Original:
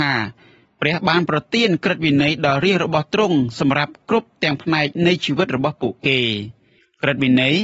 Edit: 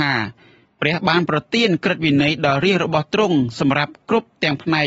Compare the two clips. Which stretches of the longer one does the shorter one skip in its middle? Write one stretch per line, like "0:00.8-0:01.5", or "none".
none